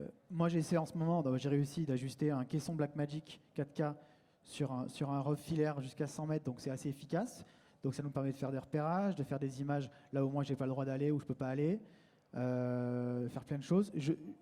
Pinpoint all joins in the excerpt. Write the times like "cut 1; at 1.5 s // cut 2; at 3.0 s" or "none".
none